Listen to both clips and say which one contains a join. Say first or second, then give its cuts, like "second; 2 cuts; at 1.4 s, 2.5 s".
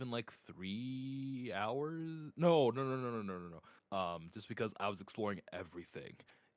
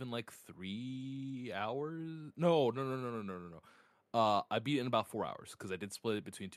first; 1 cut; at 3.8 s